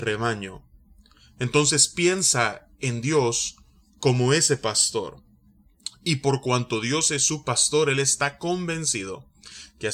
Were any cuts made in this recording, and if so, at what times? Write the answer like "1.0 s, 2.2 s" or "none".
none